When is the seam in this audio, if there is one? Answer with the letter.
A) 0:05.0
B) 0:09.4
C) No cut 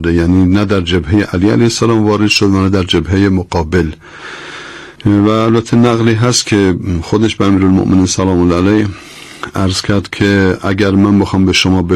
A